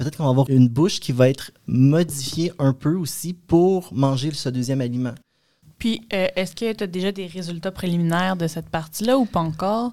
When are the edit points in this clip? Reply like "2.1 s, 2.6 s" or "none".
5.6 s